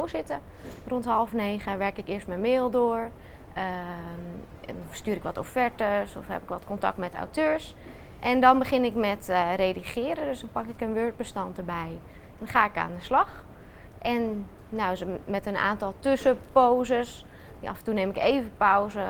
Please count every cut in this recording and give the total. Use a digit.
0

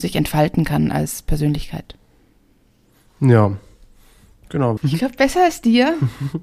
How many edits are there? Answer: 1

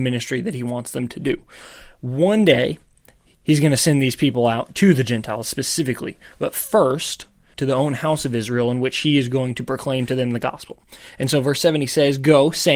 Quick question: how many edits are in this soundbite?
1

